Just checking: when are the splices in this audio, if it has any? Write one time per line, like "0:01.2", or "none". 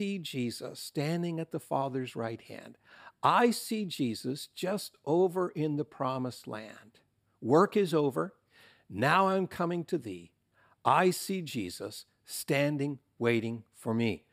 none